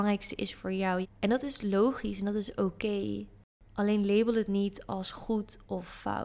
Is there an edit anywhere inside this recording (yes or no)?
yes